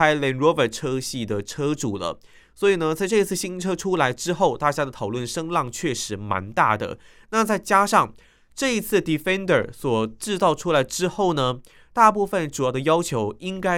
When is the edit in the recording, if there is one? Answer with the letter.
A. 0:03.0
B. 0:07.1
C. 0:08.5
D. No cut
D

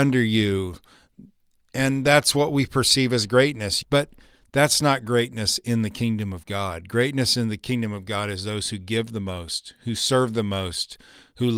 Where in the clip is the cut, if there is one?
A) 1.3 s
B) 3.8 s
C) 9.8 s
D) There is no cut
B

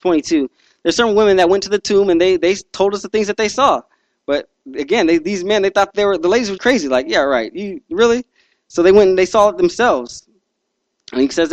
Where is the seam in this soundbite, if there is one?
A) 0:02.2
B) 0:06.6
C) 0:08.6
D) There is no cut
B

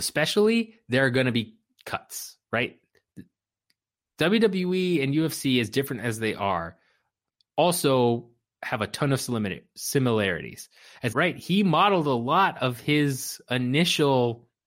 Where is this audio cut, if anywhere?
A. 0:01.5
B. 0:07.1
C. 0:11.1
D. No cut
C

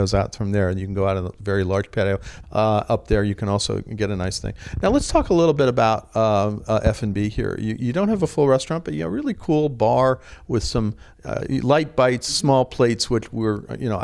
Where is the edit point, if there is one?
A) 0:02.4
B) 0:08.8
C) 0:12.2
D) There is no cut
A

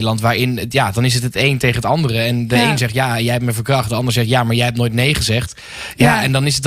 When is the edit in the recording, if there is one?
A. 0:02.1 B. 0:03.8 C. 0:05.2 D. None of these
D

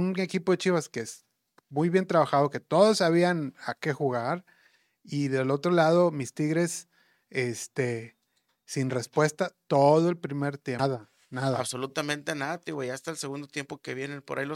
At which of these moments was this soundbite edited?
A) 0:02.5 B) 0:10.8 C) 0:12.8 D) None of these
B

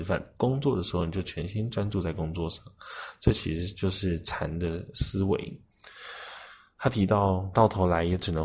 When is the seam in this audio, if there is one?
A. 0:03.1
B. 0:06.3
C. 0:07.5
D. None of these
C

